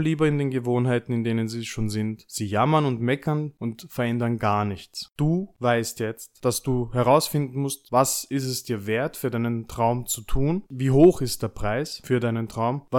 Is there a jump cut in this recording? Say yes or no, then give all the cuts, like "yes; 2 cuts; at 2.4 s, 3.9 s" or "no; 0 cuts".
no; 0 cuts